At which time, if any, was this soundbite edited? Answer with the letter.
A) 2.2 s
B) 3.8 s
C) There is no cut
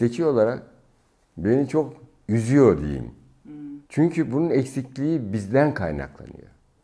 B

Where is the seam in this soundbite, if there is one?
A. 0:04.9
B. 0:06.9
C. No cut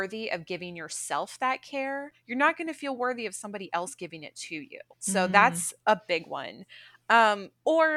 A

